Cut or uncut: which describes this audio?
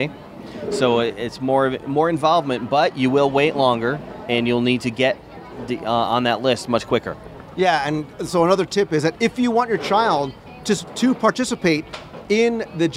uncut